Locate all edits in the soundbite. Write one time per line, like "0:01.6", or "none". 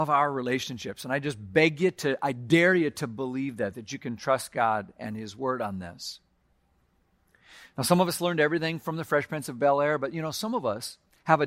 none